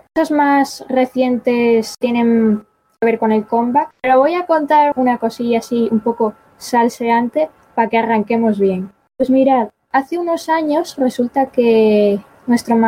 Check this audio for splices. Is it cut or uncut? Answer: cut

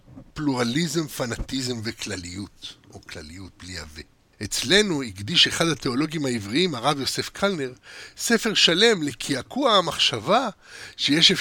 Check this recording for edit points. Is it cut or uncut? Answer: cut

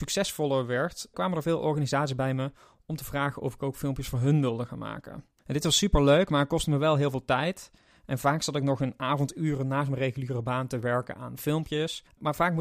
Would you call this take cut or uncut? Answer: cut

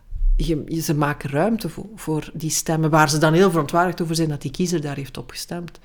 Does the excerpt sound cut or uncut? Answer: uncut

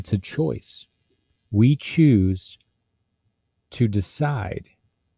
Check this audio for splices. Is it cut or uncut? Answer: uncut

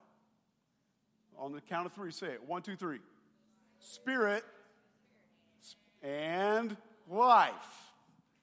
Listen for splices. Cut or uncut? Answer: uncut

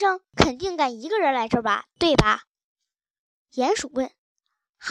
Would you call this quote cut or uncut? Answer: uncut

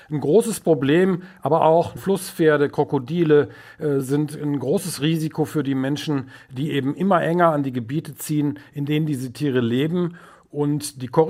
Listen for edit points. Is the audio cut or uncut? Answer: uncut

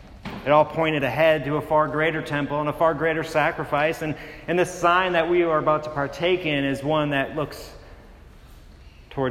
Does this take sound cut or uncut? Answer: uncut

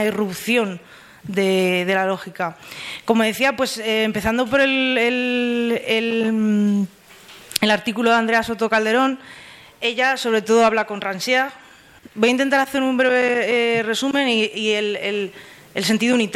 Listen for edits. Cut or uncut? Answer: uncut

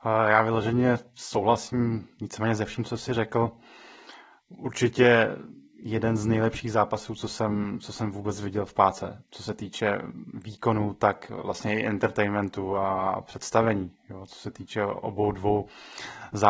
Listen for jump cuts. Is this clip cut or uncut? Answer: uncut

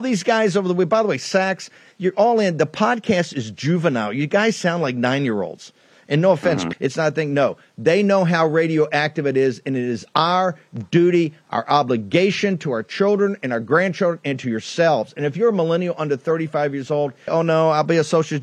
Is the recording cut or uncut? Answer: cut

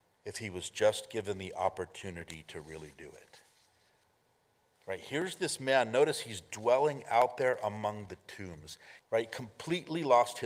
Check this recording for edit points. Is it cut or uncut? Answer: cut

